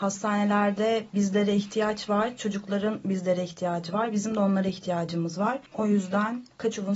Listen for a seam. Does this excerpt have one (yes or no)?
yes